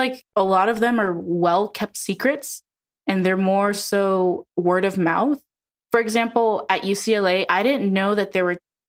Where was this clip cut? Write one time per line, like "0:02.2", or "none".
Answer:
none